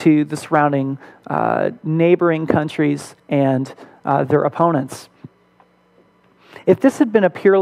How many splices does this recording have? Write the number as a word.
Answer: zero